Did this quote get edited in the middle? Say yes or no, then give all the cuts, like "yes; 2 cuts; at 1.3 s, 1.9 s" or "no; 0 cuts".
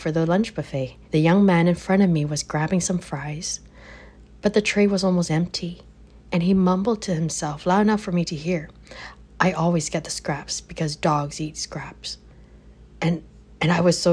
yes; 1 cut; at 1.0 s